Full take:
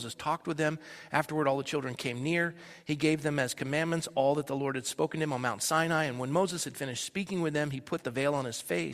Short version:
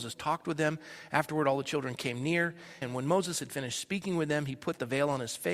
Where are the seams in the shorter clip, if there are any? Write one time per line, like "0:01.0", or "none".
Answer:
0:02.8